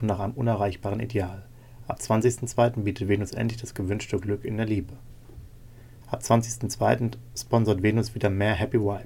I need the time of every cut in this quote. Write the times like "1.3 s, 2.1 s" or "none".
6.0 s